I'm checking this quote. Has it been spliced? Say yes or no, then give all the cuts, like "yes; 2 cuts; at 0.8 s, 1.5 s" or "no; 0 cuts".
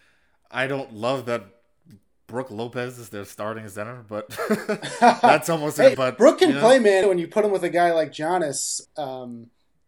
yes; 3 cuts; at 5.9 s, 7.0 s, 8.9 s